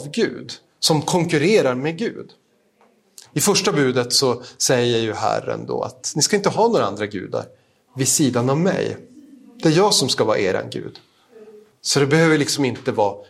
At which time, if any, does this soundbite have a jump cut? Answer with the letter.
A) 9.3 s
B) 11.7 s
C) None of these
B